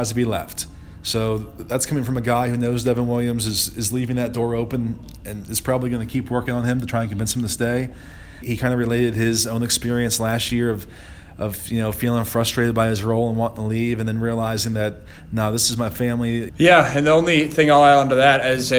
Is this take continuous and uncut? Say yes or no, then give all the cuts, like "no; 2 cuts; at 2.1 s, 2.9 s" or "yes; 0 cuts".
no; 2 cuts; at 8.4 s, 16.5 s